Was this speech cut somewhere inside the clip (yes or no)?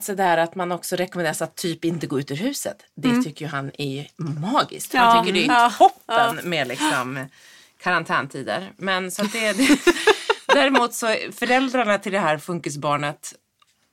no